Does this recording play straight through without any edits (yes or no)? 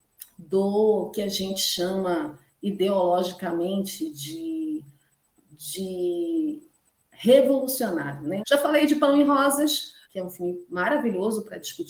no